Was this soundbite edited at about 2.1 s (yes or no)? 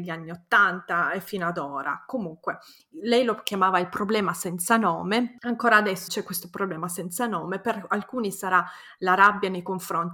no